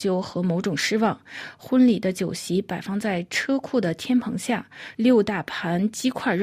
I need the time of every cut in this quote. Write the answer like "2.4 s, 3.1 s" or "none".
4.9 s